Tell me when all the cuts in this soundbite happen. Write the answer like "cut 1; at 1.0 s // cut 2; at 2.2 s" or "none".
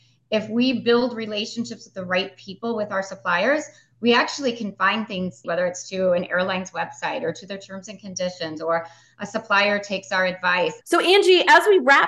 cut 1; at 5.4 s // cut 2; at 10.8 s

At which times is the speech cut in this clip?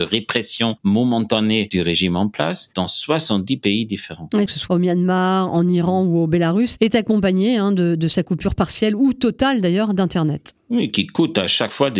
cut 1; at 4.5 s

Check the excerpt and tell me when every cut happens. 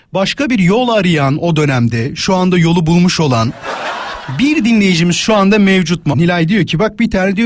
cut 1; at 6.1 s

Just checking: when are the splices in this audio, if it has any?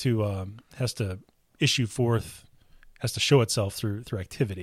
none

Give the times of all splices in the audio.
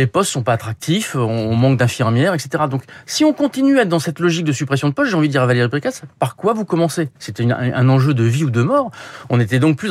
cut 1; at 7.2 s

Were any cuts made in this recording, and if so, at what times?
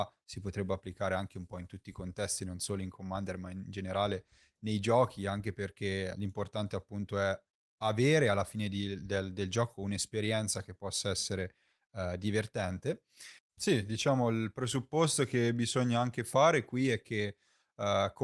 cut 1; at 6.1 s // cut 2; at 13.4 s

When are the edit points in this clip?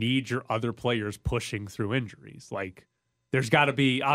none

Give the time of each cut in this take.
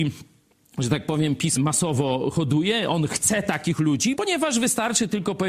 cut 1; at 1.6 s // cut 2; at 4.1 s

